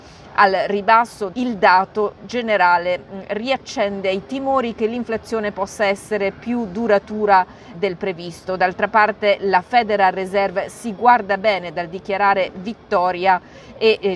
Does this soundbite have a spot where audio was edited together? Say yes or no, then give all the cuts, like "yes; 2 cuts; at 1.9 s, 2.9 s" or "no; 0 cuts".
yes; 2 cuts; at 1.3 s, 7.7 s